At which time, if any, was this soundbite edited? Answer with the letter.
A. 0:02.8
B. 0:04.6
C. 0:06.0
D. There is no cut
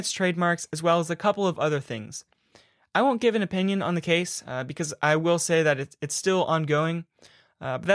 D